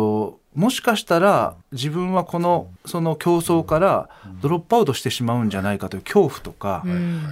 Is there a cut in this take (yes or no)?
yes